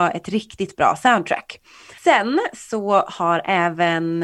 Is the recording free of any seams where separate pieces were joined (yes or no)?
no